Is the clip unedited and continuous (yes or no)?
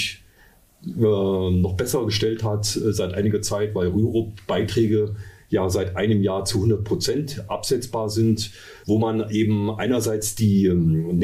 no